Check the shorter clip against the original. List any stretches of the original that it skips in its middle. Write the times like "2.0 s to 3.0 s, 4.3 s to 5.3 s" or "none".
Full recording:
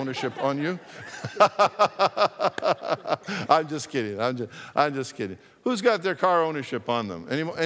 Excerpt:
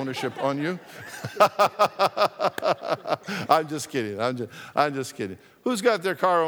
none